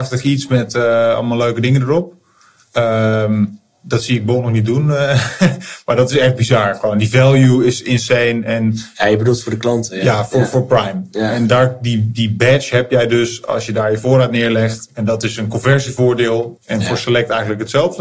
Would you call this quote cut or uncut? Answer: cut